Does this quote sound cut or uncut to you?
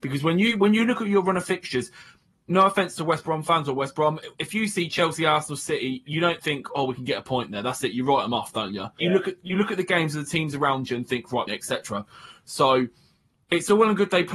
cut